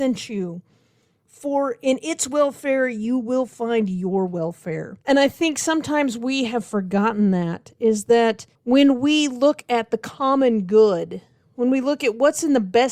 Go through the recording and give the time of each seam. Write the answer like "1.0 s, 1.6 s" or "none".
5.0 s, 8.5 s

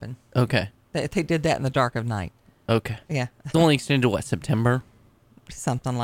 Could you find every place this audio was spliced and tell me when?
3.5 s

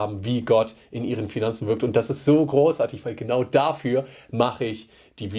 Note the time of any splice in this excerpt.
none

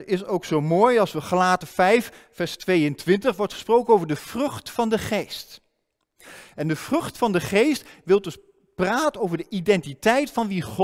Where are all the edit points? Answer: none

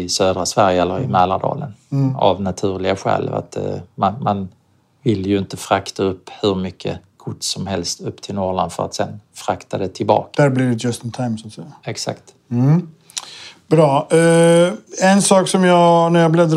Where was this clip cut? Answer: 10.3 s, 14.9 s

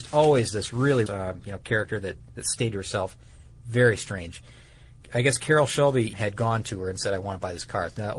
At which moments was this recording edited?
1.1 s, 6.1 s

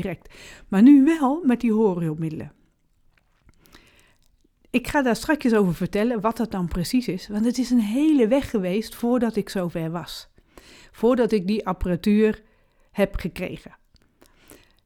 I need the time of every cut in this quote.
none

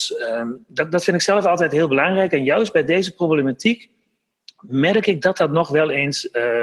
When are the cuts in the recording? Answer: none

